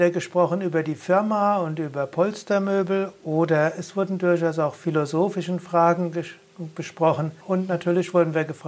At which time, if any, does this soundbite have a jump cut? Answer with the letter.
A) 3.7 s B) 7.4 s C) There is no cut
B